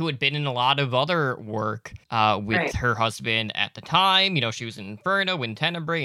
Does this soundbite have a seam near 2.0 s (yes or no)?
yes